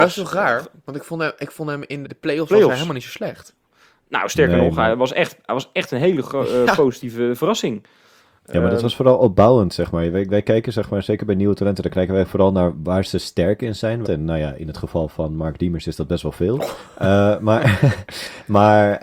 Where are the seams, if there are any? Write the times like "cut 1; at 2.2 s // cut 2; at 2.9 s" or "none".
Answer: cut 1; at 2.0 s // cut 2; at 14.0 s